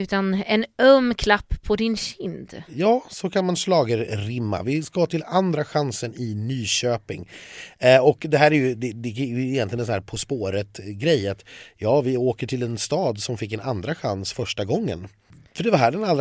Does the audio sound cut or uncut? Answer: uncut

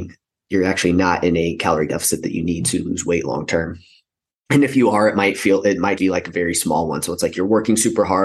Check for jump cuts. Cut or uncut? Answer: cut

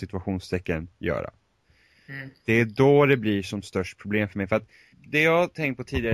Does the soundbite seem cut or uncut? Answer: cut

